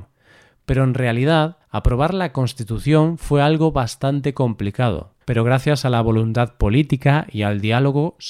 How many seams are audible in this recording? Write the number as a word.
two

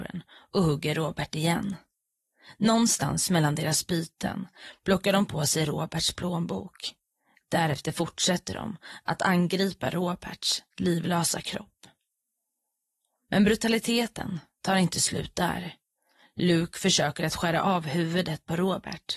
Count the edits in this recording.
zero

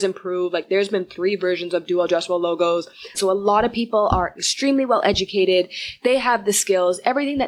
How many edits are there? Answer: one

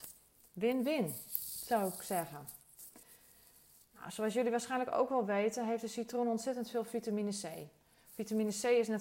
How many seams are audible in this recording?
zero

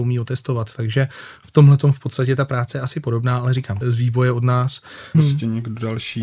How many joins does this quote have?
two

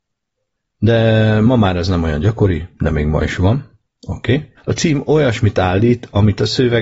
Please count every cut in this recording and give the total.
one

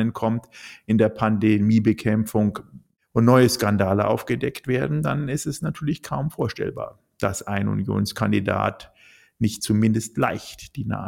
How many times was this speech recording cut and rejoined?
zero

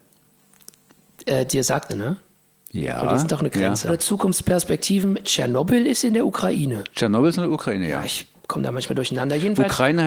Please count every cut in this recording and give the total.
three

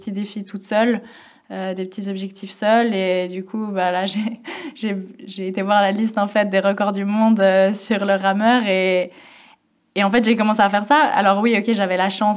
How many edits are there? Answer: zero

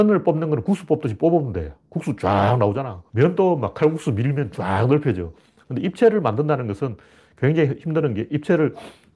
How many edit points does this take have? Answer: one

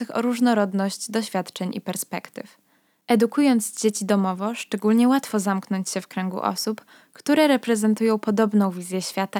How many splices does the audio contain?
zero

